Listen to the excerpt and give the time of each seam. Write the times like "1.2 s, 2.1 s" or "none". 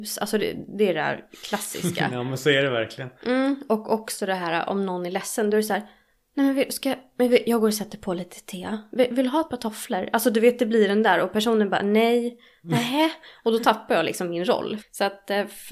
14.8 s

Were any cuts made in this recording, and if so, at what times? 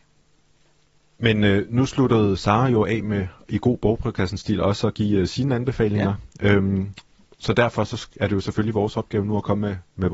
none

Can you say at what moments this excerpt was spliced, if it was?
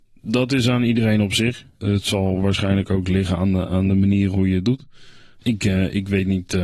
none

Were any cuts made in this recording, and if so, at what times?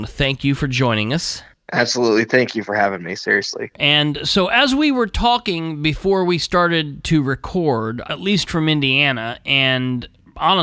3.7 s, 8.0 s

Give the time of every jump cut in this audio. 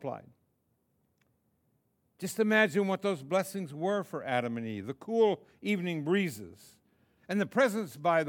7.2 s

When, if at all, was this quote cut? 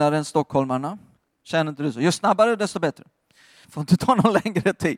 1.2 s, 3.6 s

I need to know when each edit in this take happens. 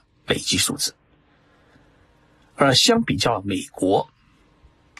none

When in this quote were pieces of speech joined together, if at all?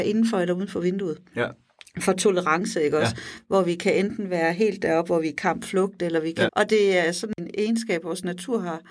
6.5 s

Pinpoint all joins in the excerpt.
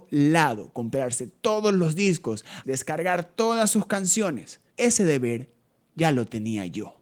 2.6 s, 4.7 s

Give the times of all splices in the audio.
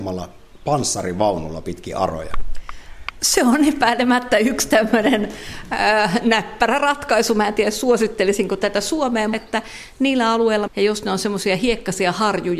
9.3 s, 10.7 s

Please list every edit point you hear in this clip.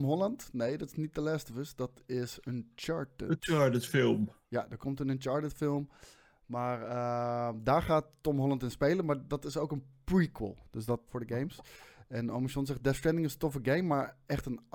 11.1 s

